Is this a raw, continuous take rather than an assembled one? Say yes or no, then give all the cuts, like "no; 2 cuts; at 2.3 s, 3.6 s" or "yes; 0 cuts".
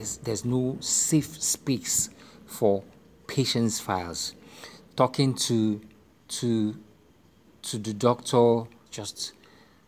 no; 1 cut; at 8.9 s